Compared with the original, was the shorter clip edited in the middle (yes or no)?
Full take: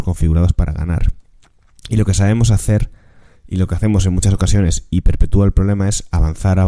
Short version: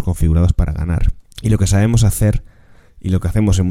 yes